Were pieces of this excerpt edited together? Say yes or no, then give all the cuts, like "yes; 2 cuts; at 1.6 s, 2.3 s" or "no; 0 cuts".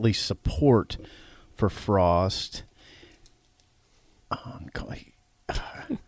no; 0 cuts